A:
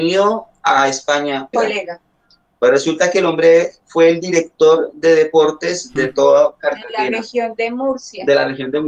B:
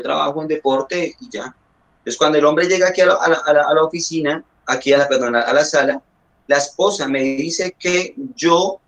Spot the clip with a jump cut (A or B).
A